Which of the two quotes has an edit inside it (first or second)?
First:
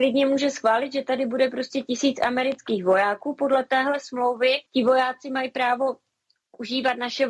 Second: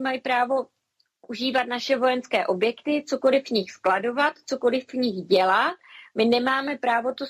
first